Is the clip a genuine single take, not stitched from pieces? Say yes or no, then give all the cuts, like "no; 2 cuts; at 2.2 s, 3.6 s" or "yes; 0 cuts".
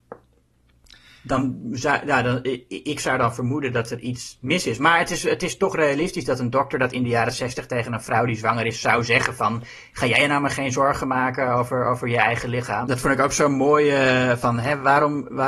no; 1 cut; at 12.8 s